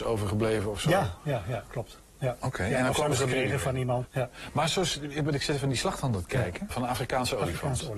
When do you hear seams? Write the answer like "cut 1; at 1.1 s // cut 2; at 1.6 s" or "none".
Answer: cut 1; at 4.1 s // cut 2; at 6.7 s